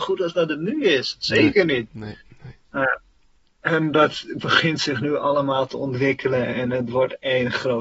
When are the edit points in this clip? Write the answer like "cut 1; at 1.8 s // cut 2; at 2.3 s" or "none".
none